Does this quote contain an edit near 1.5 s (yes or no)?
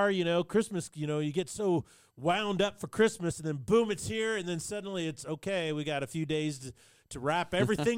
no